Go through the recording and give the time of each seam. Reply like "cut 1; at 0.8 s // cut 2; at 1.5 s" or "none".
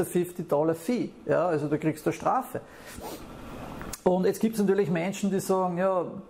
none